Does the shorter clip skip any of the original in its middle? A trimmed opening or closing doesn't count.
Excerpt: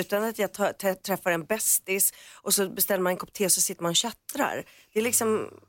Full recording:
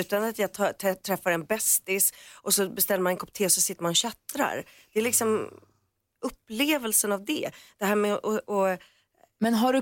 no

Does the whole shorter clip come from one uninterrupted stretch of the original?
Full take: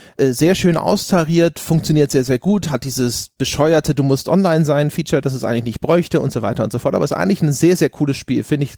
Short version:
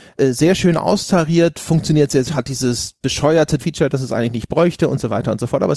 no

